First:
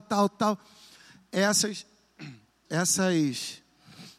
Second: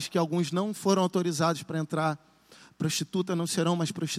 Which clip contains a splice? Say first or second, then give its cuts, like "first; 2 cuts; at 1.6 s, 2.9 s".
first; 1 cut; at 2.7 s